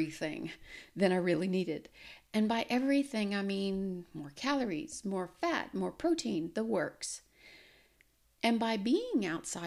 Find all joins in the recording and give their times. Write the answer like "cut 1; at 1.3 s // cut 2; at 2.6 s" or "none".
cut 1; at 5.0 s